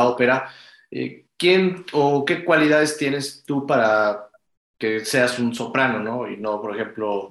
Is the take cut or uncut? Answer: uncut